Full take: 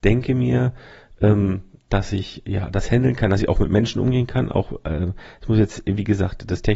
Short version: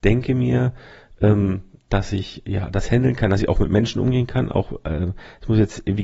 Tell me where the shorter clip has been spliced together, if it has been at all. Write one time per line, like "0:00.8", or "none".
none